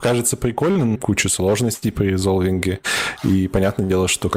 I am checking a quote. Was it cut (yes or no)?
yes